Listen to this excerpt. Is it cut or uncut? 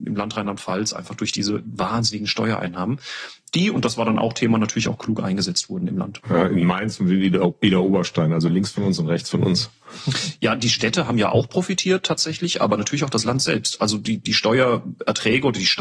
cut